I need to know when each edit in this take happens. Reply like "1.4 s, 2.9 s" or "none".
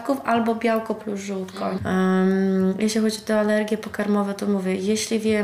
1.8 s